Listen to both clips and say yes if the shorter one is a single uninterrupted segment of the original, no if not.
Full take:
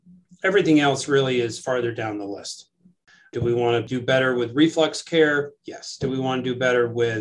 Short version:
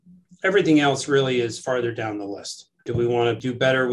no